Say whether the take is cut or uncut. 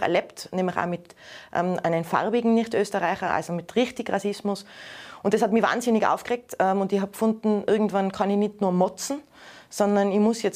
uncut